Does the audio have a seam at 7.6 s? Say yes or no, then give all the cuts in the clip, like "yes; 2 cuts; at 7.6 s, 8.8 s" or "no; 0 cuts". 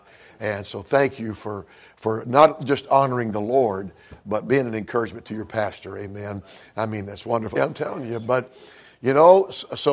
yes; 1 cut; at 7.6 s